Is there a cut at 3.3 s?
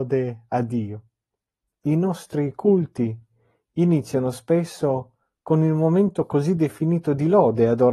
no; 1 cut; at 1.7 s

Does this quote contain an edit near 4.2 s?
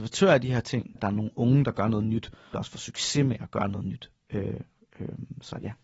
no; 2 cuts; at 1.0 s, 2.5 s

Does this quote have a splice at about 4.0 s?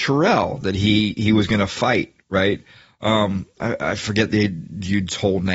no; 0 cuts

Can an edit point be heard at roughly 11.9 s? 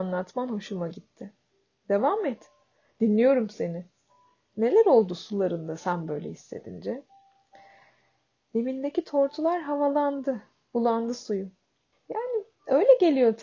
yes; 1 cut; at 11.9 s

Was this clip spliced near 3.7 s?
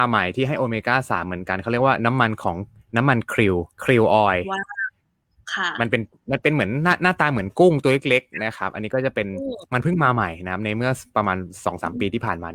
yes; 1 cut; at 3.7 s

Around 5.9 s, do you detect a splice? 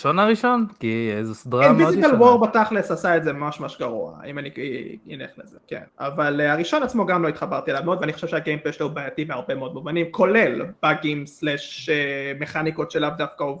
yes; 1 cut; at 5.9 s

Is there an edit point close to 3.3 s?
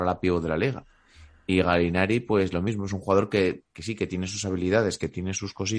no; 0 cuts

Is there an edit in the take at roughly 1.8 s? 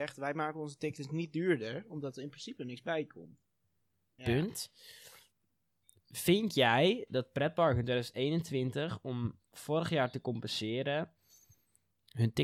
no; 1 cut; at 4.2 s

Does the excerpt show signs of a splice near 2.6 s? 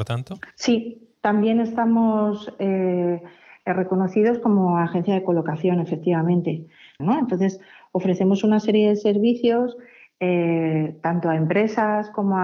no; 1 cut; at 7.0 s

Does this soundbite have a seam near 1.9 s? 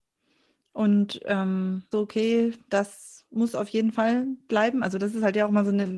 yes; 1 cut; at 1.9 s

